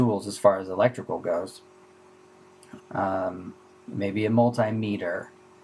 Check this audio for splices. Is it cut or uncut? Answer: cut